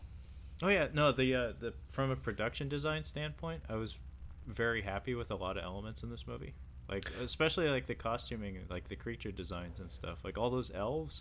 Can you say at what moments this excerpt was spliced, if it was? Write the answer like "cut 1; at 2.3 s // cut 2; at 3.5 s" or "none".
none